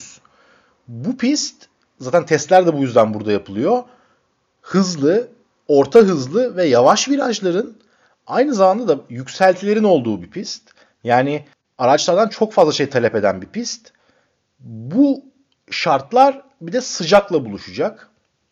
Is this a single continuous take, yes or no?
yes